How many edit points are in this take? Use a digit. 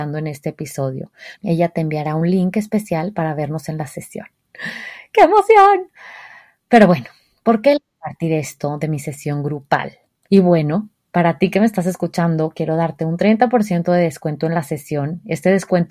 3